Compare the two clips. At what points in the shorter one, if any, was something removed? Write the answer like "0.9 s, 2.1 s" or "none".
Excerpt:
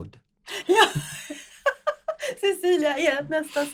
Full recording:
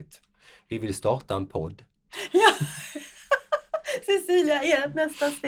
none